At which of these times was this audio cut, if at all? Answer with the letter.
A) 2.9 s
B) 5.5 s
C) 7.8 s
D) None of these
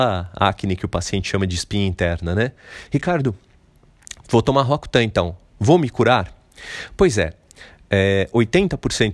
A